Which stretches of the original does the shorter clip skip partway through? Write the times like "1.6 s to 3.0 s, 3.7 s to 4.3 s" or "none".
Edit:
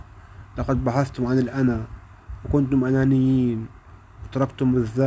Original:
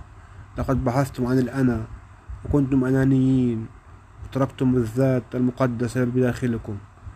none